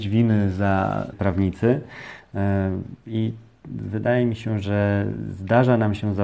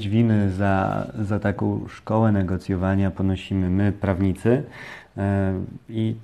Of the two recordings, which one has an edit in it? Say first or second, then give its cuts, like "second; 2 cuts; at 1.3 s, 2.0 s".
first; 1 cut; at 1.1 s